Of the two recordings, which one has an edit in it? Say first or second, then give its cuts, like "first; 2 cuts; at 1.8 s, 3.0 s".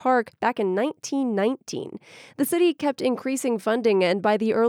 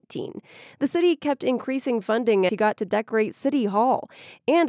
second; 1 cut; at 2.5 s